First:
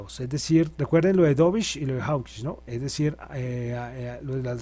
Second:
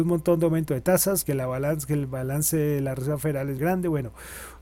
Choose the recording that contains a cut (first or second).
second